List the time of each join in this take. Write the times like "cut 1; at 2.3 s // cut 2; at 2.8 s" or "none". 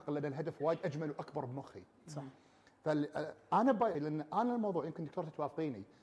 cut 1; at 3.9 s